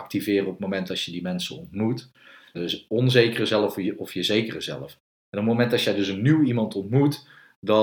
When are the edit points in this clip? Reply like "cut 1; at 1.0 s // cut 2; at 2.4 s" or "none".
cut 1; at 2.5 s